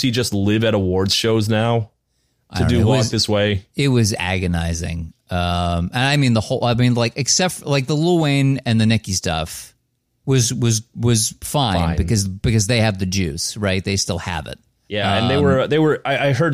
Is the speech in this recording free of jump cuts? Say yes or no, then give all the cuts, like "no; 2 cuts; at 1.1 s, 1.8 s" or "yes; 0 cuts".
yes; 0 cuts